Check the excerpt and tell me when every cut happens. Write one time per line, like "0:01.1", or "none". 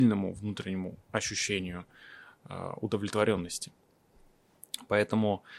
none